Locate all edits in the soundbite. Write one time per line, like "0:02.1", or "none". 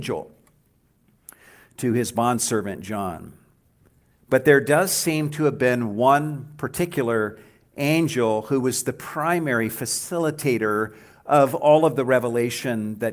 0:04.1